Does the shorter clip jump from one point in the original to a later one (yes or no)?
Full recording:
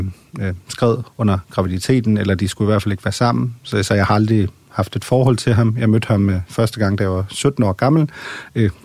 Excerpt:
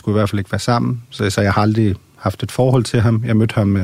no